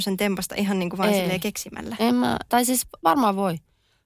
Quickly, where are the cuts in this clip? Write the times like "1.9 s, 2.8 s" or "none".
2.5 s